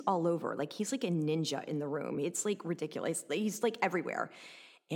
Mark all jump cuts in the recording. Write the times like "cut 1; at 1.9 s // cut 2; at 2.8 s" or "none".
none